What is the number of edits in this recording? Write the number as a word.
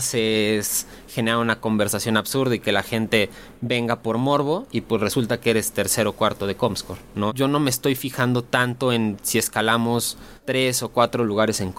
one